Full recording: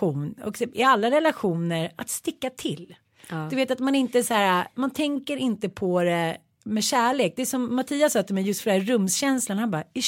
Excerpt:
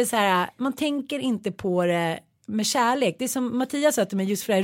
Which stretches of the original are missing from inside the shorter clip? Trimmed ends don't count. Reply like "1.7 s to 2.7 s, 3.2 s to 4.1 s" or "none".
none